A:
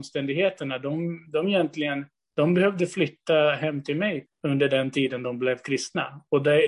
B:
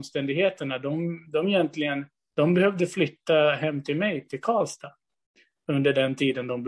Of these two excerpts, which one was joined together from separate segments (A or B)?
A